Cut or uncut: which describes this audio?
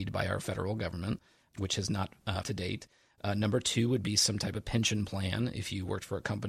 cut